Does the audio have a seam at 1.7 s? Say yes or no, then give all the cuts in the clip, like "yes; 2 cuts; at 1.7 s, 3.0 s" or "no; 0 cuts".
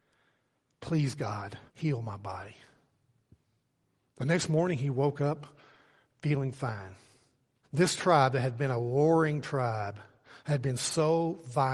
yes; 2 cuts; at 1.7 s, 7.6 s